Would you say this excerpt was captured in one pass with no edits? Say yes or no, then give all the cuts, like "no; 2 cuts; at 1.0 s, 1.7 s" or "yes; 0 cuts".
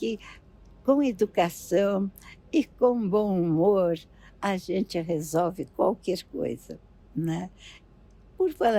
yes; 0 cuts